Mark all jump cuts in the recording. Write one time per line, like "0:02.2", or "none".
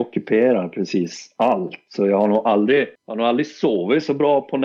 0:03.0